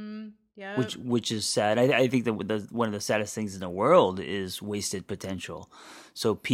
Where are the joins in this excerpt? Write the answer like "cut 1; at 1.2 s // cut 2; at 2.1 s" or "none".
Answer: none

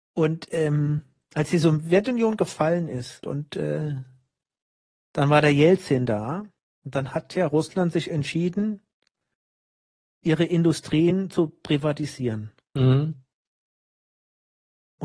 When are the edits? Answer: cut 1; at 3.2 s

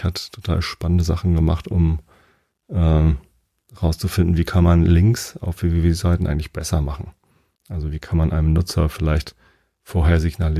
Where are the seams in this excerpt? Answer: none

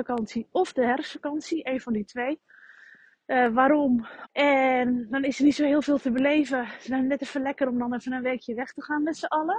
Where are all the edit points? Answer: cut 1; at 4.2 s

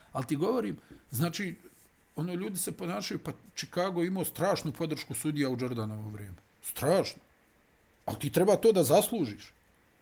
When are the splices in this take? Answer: none

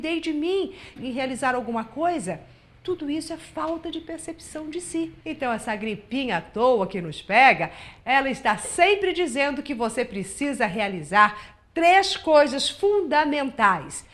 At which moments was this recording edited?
cut 1; at 1.0 s // cut 2; at 5.2 s

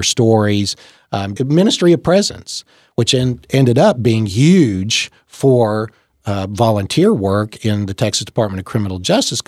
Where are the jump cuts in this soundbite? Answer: cut 1; at 1.4 s

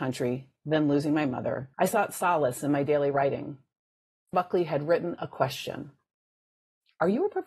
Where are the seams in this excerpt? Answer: cut 1; at 1.7 s // cut 2; at 4.3 s

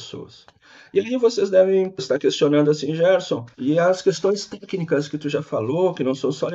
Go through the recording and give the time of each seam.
cut 1; at 2.0 s // cut 2; at 3.5 s

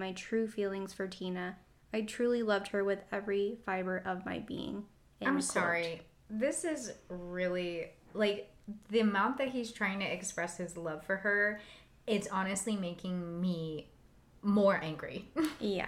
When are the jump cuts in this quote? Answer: none

